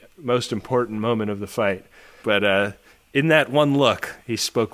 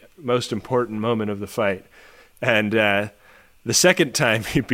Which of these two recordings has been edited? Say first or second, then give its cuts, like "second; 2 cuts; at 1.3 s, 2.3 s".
first; 1 cut; at 2.2 s